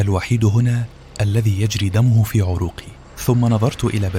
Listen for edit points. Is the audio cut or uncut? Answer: cut